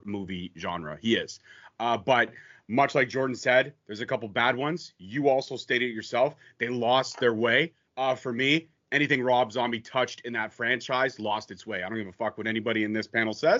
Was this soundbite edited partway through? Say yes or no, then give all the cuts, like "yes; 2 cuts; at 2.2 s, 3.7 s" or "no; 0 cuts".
no; 0 cuts